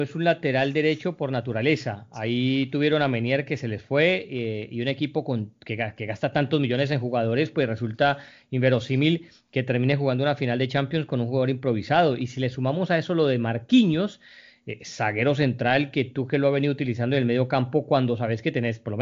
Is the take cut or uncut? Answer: uncut